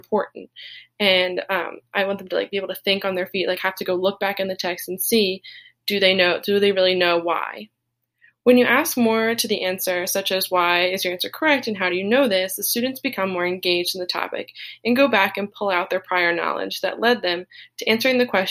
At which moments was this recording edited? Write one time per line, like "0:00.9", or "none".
none